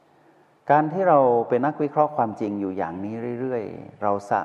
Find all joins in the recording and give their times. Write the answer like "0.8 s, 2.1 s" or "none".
1.6 s